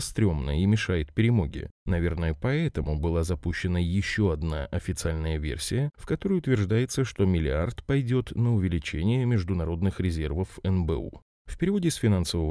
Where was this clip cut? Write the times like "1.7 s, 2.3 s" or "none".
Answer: none